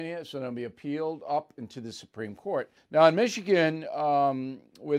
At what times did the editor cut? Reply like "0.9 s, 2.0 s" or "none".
2.8 s